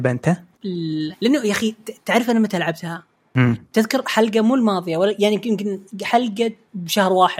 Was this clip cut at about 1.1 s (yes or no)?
yes